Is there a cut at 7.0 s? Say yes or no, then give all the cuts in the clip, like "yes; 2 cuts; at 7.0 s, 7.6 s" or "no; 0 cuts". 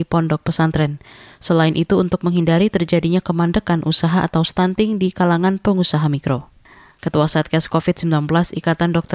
yes; 1 cut; at 7.0 s